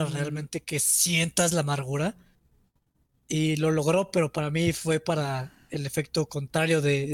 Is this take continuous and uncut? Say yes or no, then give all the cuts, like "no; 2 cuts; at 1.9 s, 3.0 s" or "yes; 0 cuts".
yes; 0 cuts